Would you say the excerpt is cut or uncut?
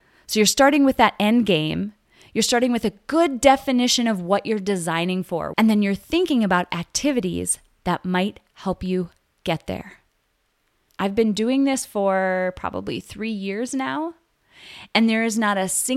cut